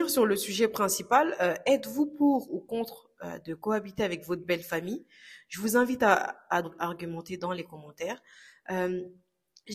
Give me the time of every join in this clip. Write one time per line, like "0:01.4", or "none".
0:06.6